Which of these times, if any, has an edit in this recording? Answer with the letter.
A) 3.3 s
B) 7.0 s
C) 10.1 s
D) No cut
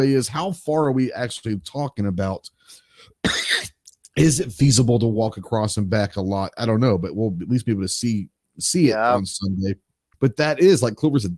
C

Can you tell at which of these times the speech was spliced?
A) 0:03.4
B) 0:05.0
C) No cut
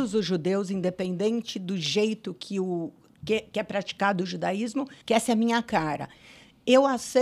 B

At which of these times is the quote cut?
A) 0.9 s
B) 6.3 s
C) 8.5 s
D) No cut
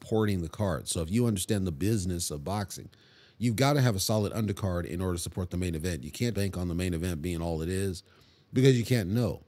B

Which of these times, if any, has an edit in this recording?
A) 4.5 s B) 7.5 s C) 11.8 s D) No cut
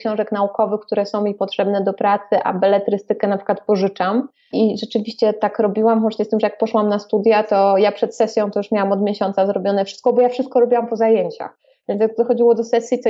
A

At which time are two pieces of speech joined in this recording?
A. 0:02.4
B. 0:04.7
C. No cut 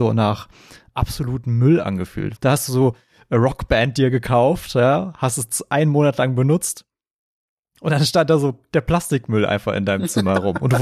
A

